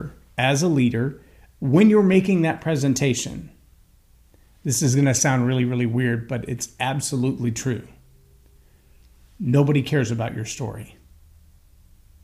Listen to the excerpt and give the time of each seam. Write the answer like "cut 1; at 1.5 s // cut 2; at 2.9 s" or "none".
none